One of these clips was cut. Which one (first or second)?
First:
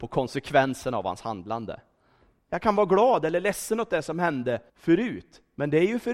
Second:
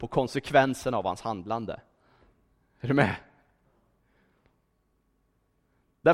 first